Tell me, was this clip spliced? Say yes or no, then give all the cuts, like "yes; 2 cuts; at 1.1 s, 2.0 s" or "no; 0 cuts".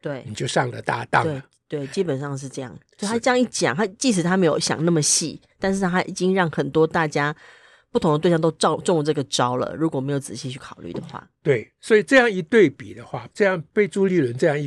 yes; 1 cut; at 13.3 s